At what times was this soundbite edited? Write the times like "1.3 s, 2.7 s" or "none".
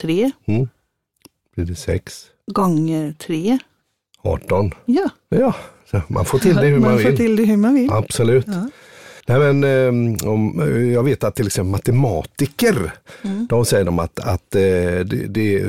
9.2 s